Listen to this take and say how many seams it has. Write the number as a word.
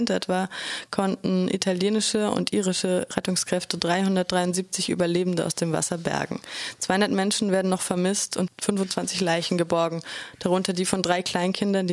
one